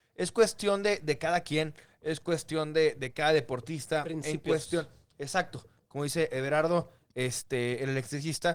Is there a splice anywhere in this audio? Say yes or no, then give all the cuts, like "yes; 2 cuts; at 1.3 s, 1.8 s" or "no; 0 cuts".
no; 0 cuts